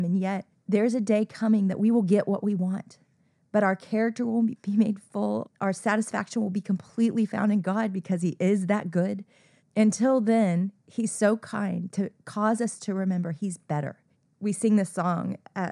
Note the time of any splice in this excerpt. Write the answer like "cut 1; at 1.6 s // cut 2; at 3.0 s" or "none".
none